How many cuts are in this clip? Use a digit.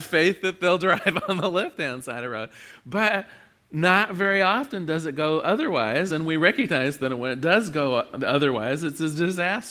0